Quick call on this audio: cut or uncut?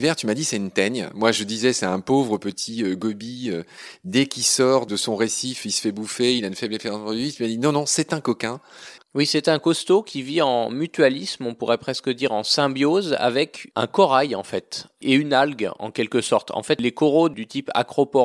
cut